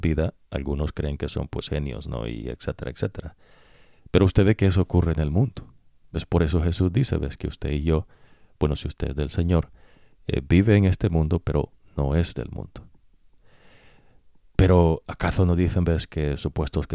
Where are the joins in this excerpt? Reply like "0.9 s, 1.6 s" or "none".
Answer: none